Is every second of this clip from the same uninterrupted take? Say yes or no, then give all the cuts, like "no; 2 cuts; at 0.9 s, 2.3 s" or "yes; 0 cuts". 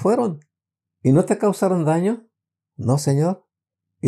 yes; 0 cuts